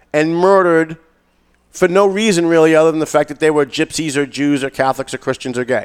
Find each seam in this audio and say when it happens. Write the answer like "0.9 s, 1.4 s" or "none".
none